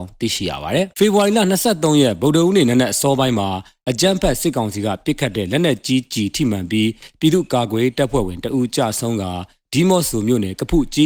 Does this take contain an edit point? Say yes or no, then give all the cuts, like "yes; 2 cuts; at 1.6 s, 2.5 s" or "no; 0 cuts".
yes; 1 cut; at 0.9 s